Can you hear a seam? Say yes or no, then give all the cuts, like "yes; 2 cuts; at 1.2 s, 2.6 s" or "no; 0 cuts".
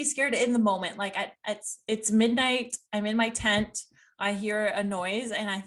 no; 0 cuts